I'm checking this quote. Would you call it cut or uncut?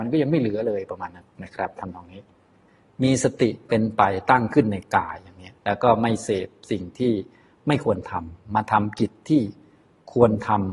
cut